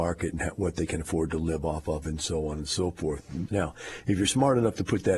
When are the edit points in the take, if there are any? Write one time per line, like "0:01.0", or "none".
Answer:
0:03.5